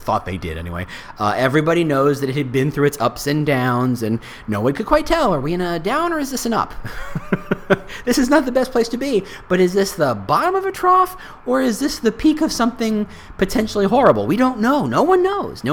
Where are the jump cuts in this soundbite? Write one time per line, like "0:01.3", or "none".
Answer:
none